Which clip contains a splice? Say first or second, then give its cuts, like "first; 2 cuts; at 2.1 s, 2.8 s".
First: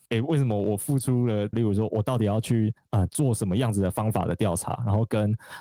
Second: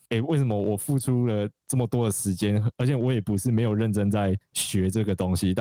first; 1 cut; at 1.5 s